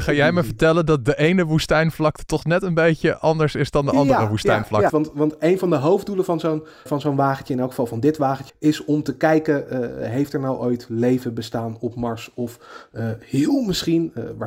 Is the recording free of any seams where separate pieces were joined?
no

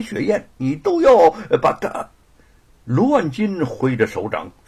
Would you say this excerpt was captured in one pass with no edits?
yes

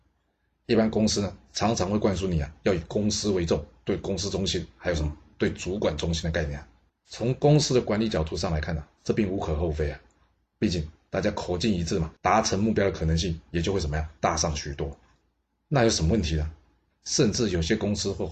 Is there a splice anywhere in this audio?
yes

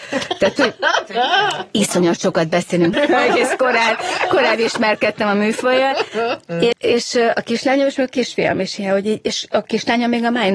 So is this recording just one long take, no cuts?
no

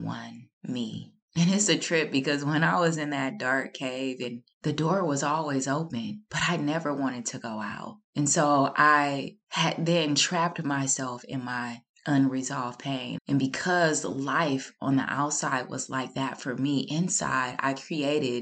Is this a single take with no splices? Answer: no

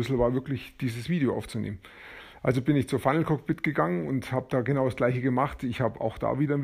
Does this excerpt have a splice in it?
no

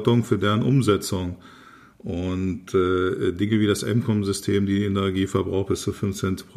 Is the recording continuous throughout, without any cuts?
yes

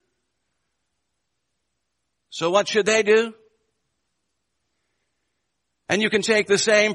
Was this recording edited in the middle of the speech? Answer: no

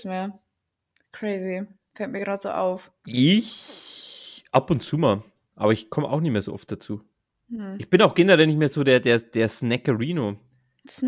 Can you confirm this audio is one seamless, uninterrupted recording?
no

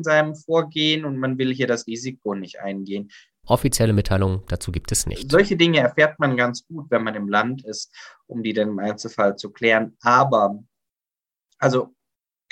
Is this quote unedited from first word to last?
no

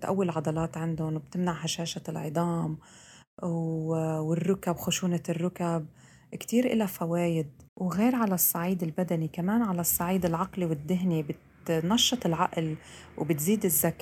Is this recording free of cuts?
no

